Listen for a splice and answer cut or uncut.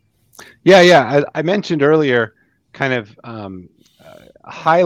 cut